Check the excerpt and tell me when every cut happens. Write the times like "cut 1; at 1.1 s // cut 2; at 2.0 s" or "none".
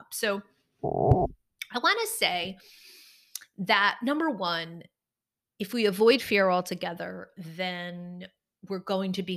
none